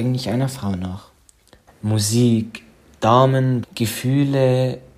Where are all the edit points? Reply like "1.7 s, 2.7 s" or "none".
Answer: 1.7 s, 3.6 s